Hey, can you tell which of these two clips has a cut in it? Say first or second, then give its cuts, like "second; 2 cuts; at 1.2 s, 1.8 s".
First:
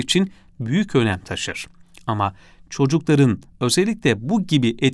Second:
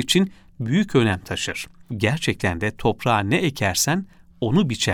second; 1 cut; at 1.9 s